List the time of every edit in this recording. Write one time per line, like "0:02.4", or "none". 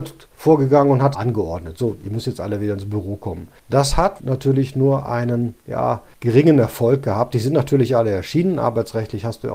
0:01.1
0:04.2